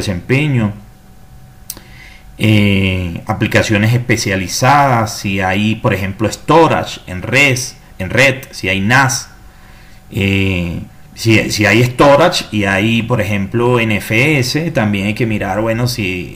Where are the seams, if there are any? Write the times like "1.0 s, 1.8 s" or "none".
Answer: 11.1 s

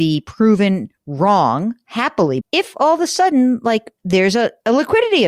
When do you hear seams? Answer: 2.4 s

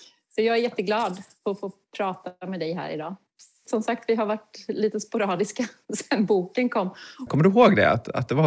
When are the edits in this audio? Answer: 3.6 s, 7.3 s

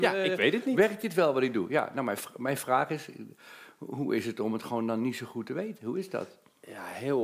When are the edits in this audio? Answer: none

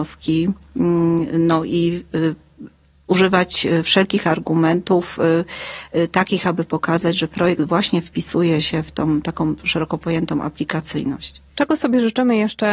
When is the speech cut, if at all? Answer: none

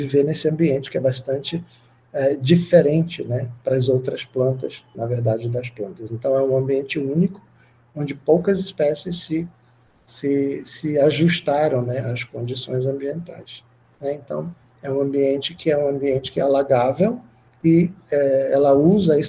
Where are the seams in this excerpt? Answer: 4.9 s, 13.8 s

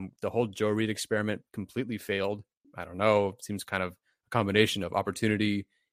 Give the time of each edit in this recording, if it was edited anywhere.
2.6 s

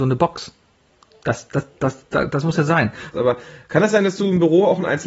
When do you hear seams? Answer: 3.1 s

